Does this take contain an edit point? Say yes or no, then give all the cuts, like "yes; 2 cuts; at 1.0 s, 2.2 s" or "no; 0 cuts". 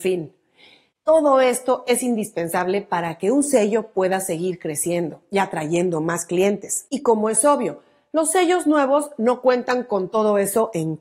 no; 0 cuts